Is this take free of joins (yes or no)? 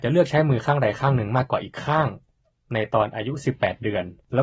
yes